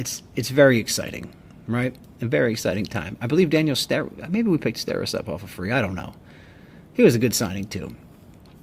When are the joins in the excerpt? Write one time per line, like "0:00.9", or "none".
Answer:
none